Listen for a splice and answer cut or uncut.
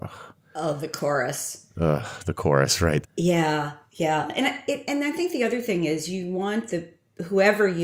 cut